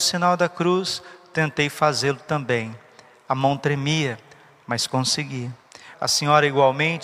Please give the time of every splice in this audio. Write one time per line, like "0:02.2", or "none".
0:05.9